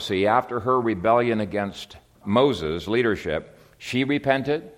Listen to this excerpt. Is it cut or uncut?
cut